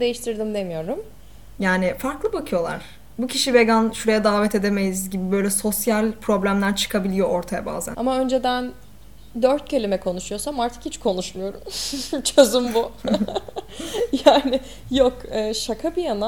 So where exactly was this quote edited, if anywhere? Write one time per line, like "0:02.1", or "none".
0:01.6
0:07.9